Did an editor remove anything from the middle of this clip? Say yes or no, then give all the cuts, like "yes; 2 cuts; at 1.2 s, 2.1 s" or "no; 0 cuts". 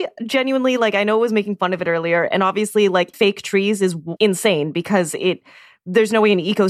yes; 2 cuts; at 3.1 s, 4.2 s